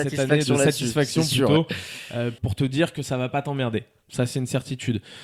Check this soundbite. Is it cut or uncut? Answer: uncut